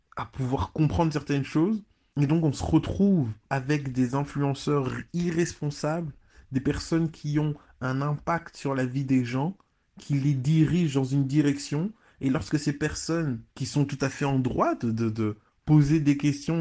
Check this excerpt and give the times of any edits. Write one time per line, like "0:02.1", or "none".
0:02.1
0:03.4
0:13.5